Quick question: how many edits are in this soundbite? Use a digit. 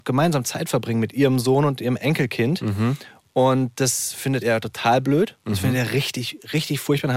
0